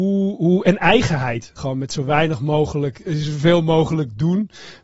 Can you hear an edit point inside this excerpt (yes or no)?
yes